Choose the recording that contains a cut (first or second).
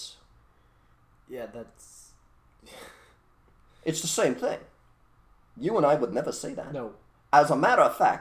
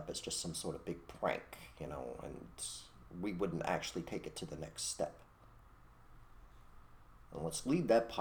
first